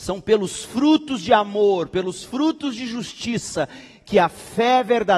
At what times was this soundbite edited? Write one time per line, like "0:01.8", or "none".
none